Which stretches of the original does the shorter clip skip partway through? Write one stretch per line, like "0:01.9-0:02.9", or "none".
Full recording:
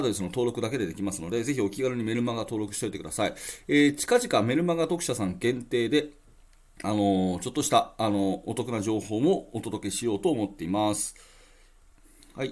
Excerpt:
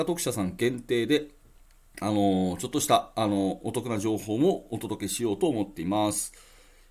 none